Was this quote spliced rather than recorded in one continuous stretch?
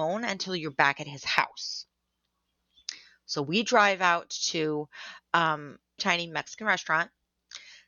yes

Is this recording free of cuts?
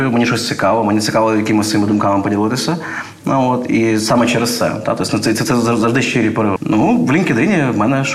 no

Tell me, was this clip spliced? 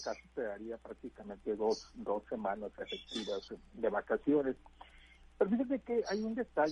no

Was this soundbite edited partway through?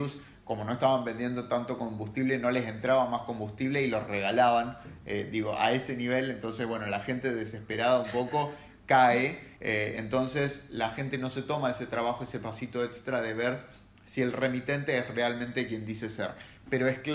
yes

